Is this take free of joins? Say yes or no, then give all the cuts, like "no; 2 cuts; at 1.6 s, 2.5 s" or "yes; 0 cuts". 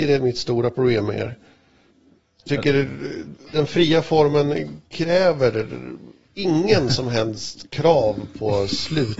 no; 1 cut; at 6.3 s